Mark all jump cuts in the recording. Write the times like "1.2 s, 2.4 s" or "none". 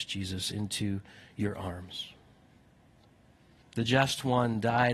3.6 s